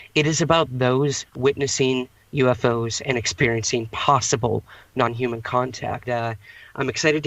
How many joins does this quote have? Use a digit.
1